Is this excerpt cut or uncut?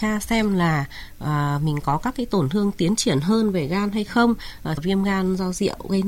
cut